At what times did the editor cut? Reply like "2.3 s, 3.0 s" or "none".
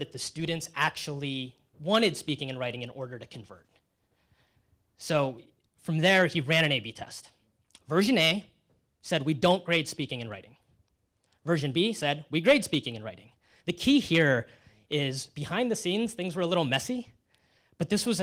none